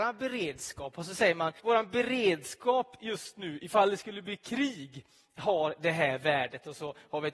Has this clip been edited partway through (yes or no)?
yes